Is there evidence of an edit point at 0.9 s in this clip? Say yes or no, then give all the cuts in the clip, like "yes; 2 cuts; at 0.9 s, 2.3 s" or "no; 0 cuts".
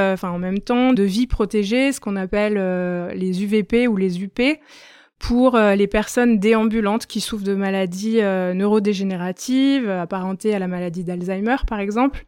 yes; 1 cut; at 0.9 s